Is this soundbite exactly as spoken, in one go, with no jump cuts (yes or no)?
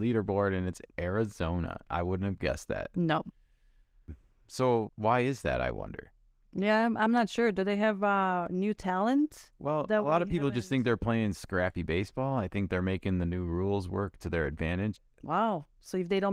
no